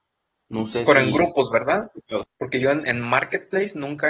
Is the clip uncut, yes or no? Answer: no